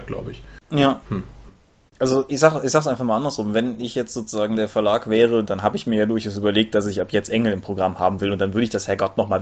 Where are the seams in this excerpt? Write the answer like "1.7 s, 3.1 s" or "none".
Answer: 1.9 s, 5.4 s